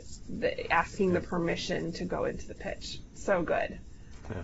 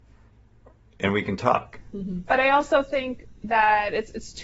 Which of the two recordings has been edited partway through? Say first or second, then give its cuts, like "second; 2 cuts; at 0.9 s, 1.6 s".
second; 1 cut; at 2.3 s